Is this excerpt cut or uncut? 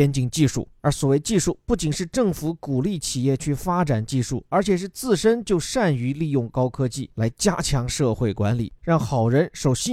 cut